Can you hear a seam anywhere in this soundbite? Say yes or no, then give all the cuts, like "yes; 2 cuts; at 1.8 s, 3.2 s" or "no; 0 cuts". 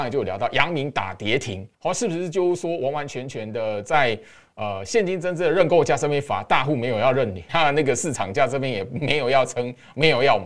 yes; 2 cuts; at 1.7 s, 7.5 s